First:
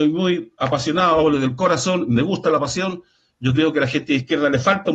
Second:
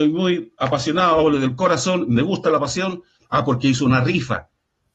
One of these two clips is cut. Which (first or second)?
second